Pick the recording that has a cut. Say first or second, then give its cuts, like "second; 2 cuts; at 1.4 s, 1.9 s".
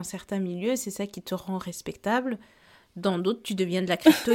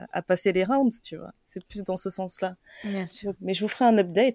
second; 1 cut; at 3.3 s